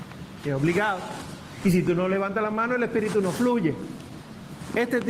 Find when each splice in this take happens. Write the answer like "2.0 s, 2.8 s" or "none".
none